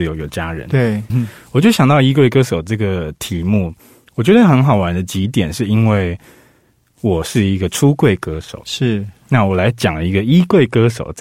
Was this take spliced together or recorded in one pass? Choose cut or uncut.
cut